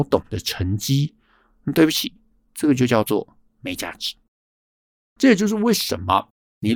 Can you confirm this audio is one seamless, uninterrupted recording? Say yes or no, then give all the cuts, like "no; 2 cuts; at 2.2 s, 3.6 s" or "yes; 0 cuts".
yes; 0 cuts